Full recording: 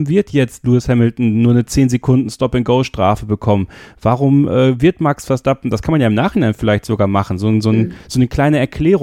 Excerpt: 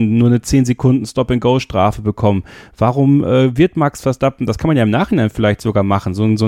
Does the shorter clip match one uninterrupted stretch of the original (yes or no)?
yes